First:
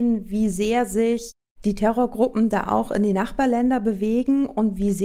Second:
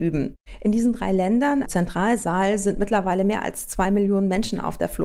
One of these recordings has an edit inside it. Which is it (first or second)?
second